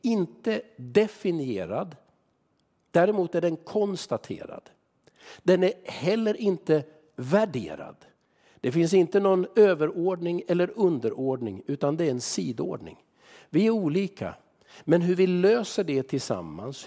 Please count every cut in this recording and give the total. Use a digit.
0